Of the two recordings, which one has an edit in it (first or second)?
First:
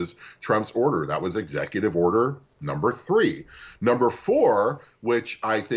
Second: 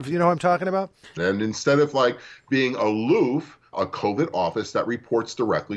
second